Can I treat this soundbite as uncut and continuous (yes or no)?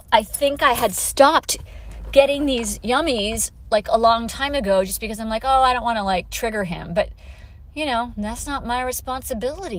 yes